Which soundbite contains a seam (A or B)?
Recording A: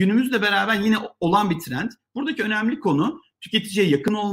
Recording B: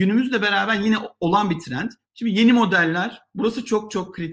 B